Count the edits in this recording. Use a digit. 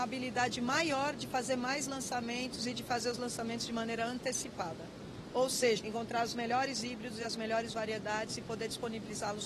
1